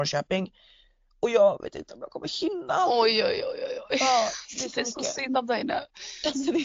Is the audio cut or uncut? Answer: uncut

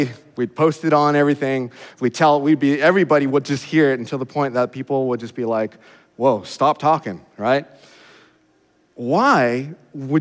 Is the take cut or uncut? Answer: uncut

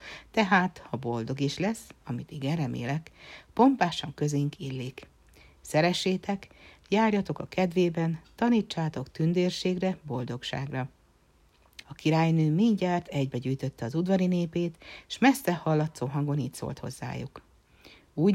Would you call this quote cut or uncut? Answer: cut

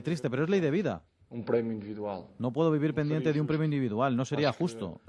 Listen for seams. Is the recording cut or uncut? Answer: uncut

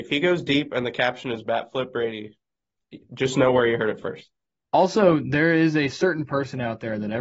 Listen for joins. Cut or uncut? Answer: uncut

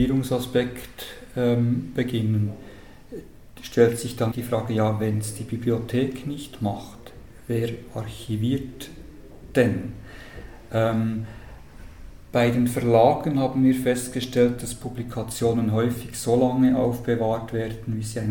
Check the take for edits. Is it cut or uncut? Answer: cut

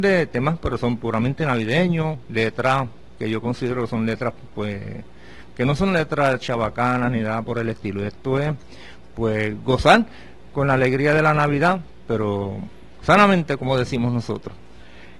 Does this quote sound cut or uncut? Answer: uncut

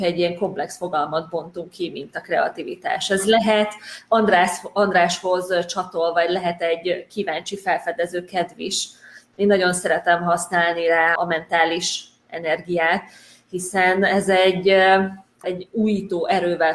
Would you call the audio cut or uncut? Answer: cut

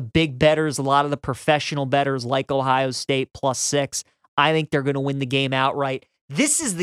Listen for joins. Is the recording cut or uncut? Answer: uncut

